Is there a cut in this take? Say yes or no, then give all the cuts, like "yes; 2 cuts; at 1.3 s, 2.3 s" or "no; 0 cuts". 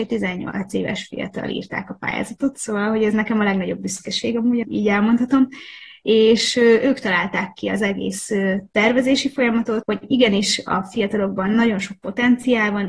yes; 2 cuts; at 4.6 s, 9.8 s